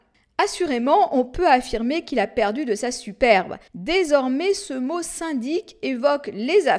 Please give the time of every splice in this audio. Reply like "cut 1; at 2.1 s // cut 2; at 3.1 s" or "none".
cut 1; at 3.7 s